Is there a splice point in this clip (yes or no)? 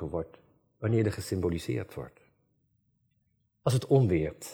yes